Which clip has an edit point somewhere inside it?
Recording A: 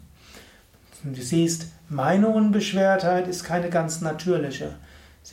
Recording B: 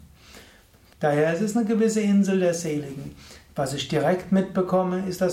B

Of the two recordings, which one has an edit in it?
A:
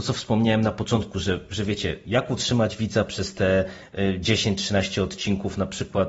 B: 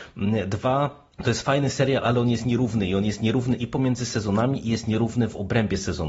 B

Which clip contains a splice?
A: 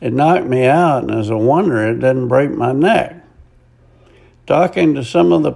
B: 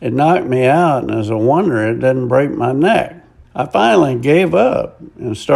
B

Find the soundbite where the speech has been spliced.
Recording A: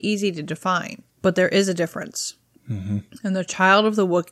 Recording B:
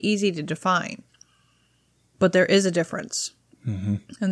A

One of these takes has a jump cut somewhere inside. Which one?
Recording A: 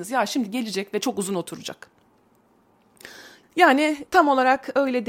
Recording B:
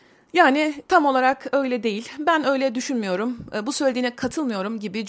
A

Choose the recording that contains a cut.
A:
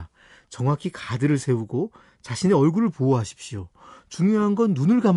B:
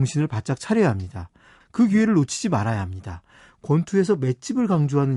B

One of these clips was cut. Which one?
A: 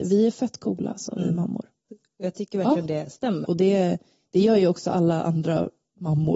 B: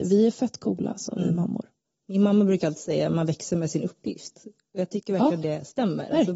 A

